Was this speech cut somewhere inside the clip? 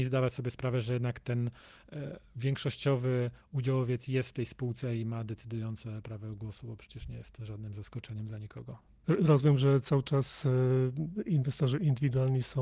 yes; 1 cut; at 9.0 s

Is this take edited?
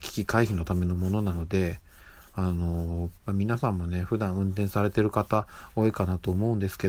yes; 1 cut; at 3.2 s

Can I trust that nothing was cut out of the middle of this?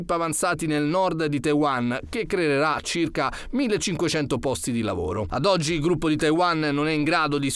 yes; 0 cuts

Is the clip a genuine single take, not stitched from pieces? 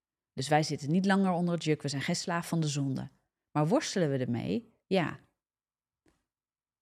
yes; 0 cuts

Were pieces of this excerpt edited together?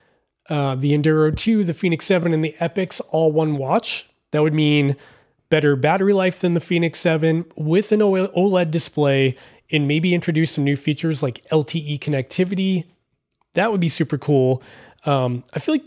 no; 0 cuts

